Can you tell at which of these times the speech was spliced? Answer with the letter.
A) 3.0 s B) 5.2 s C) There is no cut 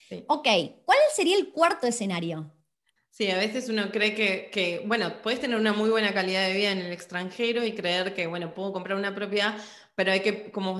A